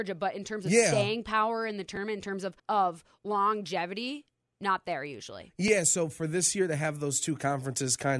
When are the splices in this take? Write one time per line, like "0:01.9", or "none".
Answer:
0:02.6